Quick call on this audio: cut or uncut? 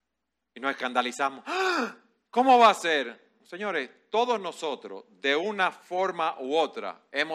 uncut